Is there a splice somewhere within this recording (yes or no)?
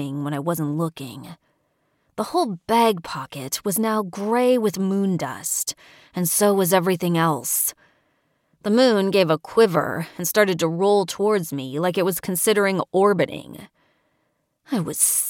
no